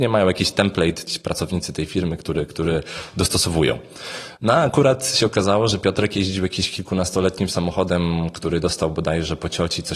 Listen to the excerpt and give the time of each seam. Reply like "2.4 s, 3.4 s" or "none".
none